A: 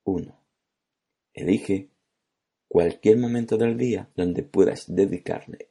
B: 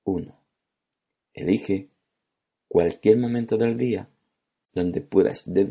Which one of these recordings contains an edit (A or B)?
A